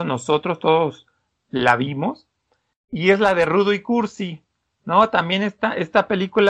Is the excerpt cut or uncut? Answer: uncut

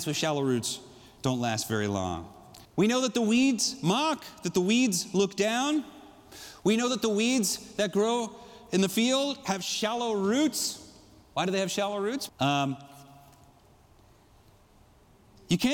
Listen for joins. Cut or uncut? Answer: cut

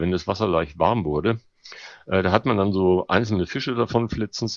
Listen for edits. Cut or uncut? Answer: uncut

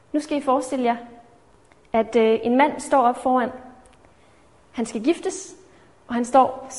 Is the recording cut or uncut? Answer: uncut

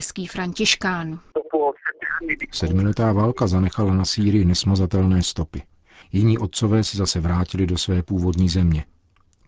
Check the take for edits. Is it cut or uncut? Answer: cut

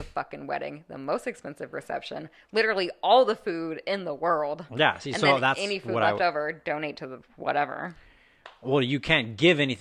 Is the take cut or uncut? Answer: uncut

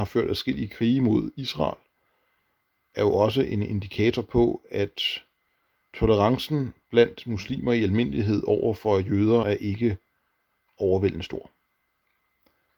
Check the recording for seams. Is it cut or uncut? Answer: cut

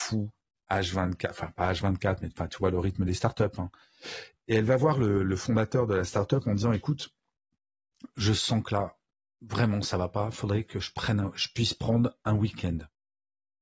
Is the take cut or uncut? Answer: uncut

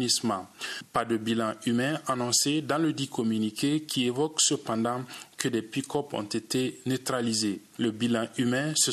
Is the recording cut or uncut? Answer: uncut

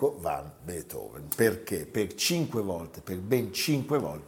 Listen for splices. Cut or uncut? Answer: uncut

